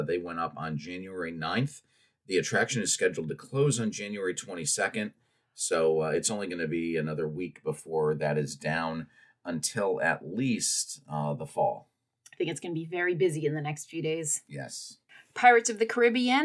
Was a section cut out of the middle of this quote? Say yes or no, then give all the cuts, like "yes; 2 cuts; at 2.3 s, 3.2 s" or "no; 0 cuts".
no; 0 cuts